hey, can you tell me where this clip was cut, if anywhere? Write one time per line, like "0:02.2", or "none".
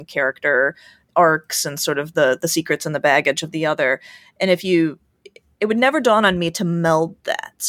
none